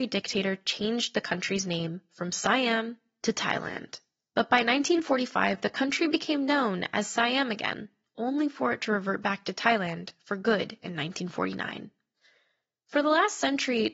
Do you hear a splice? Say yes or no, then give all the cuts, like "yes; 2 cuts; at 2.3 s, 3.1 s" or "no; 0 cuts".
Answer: no; 0 cuts